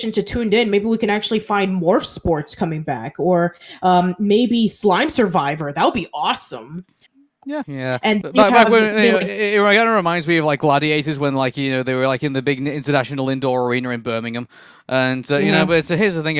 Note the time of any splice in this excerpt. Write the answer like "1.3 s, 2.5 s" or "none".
7.6 s